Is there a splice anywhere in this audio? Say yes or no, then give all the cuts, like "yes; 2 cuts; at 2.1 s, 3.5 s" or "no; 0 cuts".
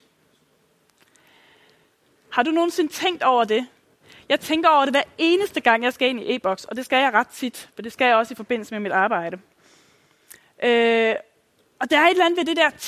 no; 0 cuts